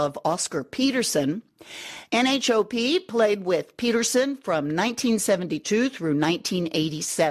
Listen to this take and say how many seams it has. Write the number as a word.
zero